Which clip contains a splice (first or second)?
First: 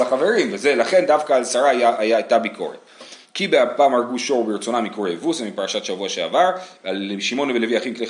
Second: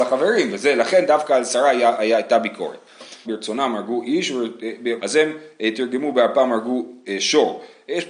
second